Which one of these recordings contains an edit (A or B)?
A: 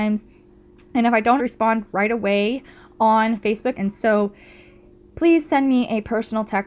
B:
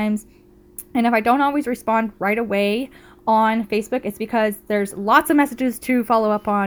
A